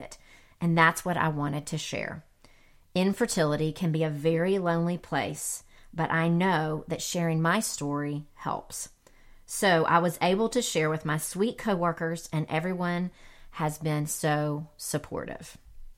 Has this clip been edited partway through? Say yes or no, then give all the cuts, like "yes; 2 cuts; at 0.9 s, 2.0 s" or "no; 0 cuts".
no; 0 cuts